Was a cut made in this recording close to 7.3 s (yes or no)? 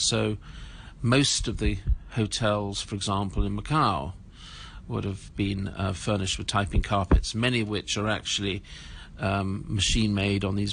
no